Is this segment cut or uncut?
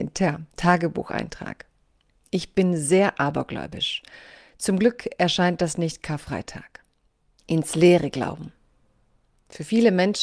cut